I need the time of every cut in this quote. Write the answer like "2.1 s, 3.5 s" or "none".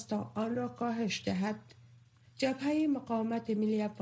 none